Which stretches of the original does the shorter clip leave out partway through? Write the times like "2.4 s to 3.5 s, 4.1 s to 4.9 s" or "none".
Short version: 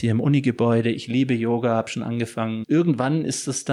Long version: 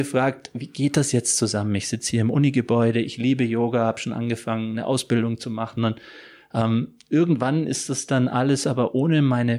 4.7 s to 7.0 s

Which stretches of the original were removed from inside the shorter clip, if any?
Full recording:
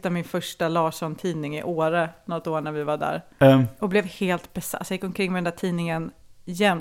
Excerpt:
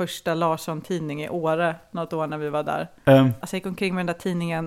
3.7 s to 4.8 s

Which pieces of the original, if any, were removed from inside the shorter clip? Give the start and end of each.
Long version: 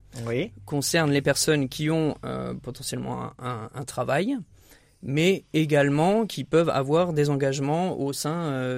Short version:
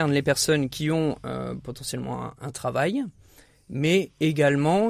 3.4 s to 3.7 s

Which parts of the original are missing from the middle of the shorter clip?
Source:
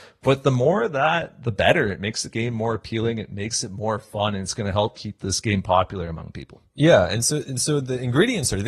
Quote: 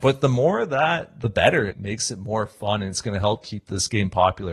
1.9 s to 3.2 s

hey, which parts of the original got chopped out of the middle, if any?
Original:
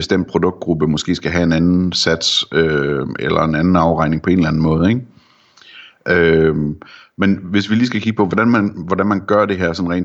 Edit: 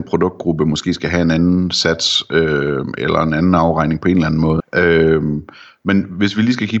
4.8 s to 5.9 s

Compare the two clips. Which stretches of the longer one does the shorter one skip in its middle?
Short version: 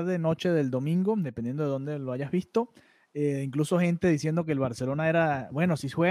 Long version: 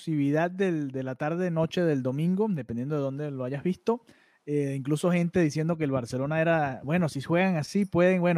none

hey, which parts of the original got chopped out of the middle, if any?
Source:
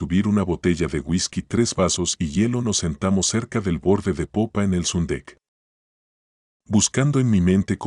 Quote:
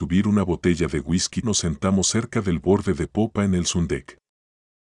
1.4 s to 2.6 s

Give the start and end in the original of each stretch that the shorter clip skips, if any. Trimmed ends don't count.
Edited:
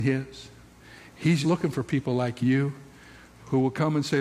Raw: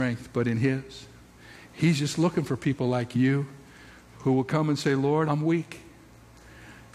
2.0 s to 2.2 s

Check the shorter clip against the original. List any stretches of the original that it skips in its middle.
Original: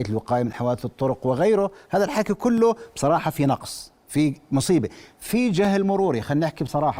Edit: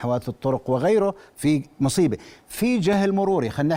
1.9 s to 4.0 s

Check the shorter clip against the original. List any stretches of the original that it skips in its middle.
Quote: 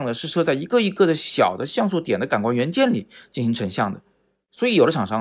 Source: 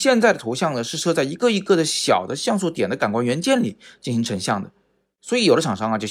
none

